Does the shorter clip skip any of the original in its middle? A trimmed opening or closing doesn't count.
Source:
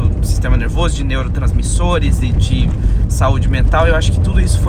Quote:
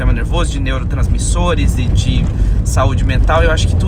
no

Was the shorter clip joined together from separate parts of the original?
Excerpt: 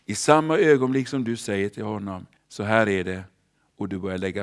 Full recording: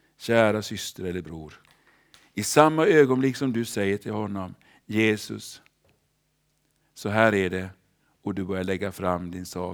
yes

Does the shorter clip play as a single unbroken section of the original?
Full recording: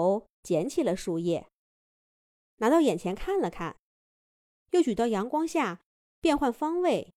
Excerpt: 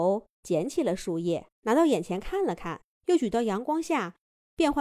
no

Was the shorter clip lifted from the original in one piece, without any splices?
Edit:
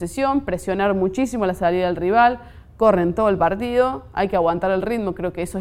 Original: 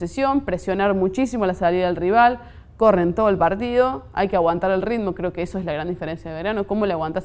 yes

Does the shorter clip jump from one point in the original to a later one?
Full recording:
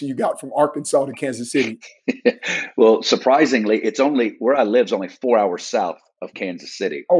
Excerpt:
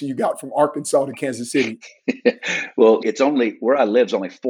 yes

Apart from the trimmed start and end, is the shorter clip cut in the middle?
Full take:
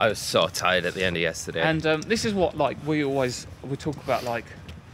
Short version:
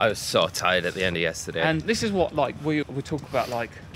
yes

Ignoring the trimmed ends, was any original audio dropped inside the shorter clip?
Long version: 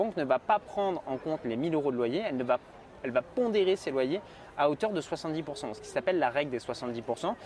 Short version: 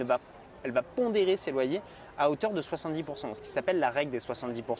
no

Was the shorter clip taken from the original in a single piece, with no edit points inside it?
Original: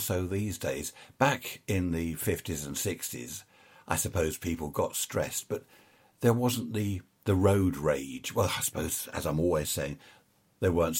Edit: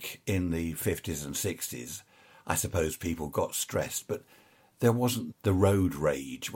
no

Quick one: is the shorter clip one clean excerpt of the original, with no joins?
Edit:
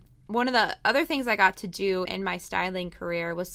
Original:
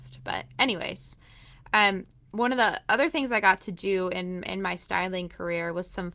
no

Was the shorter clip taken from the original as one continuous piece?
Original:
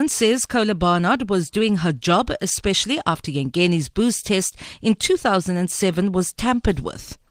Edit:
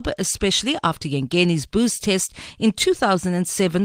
yes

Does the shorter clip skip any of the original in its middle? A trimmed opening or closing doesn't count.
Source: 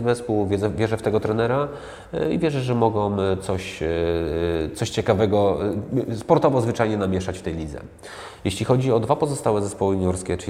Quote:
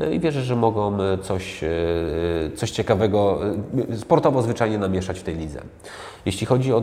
no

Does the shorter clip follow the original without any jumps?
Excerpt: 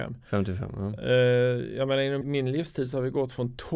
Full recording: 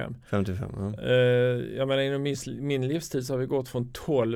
no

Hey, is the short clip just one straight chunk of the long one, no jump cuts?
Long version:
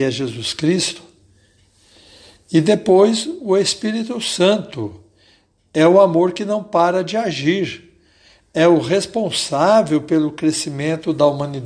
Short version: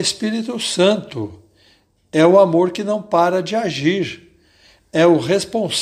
yes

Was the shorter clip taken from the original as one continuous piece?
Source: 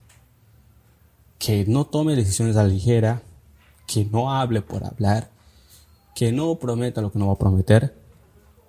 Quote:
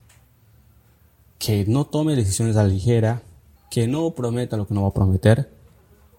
no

